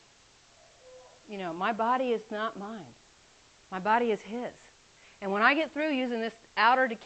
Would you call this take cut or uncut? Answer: uncut